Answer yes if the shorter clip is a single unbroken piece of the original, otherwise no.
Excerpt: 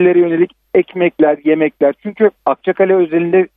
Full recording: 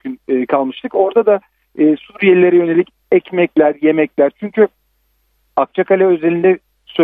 no